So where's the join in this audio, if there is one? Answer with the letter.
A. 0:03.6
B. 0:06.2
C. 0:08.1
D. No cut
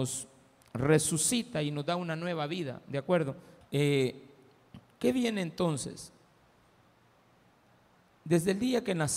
A